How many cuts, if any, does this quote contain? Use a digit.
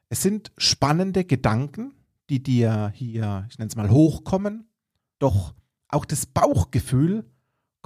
1